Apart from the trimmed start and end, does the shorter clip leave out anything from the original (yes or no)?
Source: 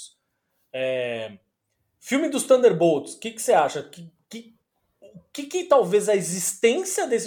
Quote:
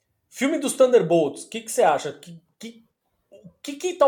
no